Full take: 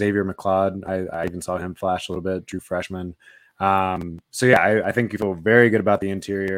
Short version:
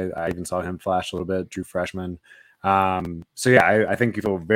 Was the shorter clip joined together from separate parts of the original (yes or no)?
no